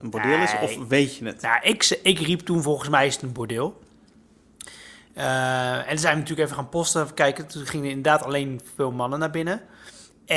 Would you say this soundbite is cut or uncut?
uncut